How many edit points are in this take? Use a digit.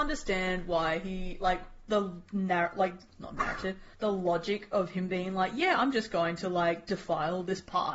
1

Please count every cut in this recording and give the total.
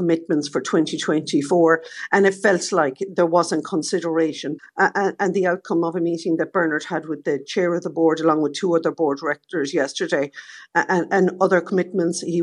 1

